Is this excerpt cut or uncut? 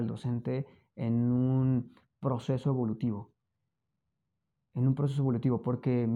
uncut